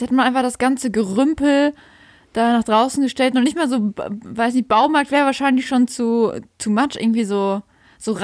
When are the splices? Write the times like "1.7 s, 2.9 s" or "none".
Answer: none